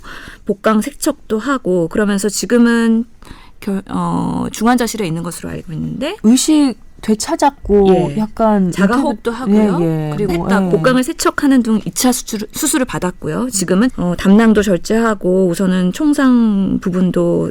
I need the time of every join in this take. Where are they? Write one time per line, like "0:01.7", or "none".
0:10.3
0:13.9